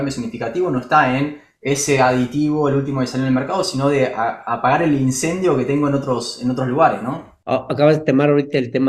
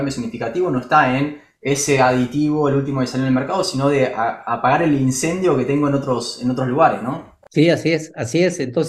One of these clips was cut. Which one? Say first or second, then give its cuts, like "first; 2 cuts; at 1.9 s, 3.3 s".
first; 1 cut; at 7.4 s